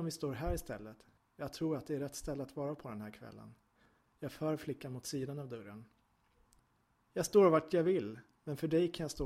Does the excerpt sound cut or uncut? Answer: uncut